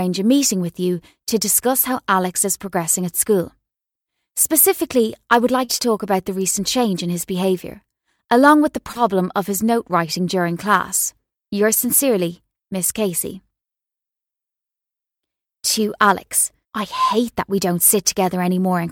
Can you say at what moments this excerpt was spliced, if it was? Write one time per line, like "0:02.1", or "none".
0:11.3
0:16.6